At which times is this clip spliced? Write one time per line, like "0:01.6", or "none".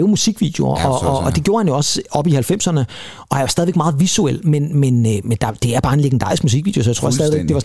none